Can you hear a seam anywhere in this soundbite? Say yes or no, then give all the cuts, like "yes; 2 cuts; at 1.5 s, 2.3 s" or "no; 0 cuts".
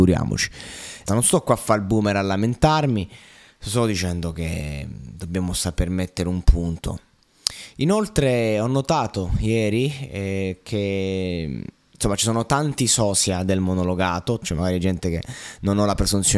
yes; 2 cuts; at 1.1 s, 14.4 s